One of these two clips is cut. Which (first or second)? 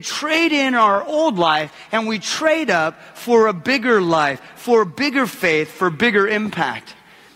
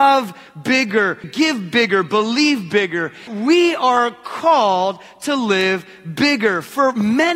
second